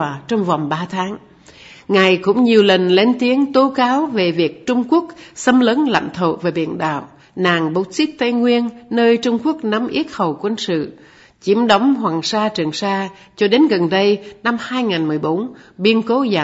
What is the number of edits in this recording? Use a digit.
0